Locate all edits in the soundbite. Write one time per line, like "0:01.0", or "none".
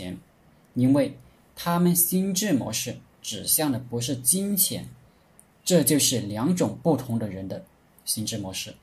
0:05.5